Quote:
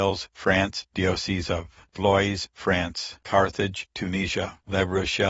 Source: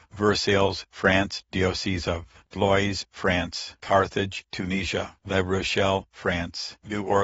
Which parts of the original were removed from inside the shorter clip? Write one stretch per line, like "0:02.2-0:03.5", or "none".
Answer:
none